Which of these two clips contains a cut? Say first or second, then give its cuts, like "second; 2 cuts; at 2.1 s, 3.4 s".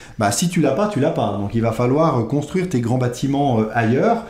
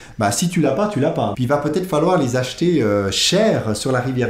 second; 1 cut; at 1.3 s